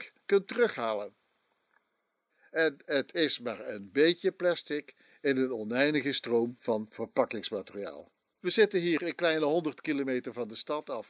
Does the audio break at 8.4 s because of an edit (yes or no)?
yes